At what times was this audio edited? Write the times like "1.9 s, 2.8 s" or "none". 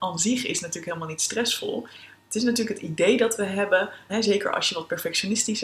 4.1 s